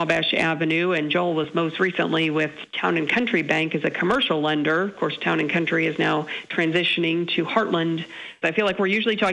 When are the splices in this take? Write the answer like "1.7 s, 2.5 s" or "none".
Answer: 8.4 s